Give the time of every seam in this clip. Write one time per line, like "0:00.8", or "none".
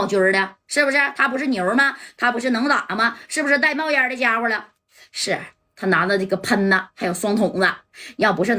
none